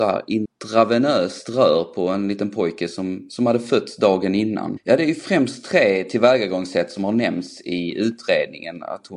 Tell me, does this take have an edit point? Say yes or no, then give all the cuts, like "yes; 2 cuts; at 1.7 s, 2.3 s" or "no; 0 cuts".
yes; 1 cut; at 4.8 s